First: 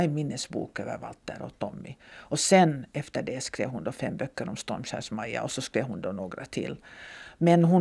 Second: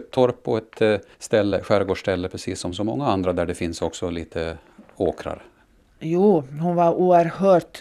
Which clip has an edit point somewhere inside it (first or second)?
second